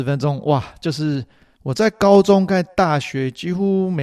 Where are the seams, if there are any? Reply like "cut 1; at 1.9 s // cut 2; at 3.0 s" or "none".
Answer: cut 1; at 1.6 s